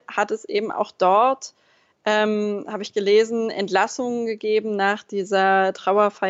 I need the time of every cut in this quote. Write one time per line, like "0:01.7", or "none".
none